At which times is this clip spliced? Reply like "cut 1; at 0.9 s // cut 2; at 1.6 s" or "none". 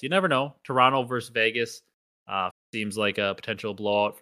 cut 1; at 2.5 s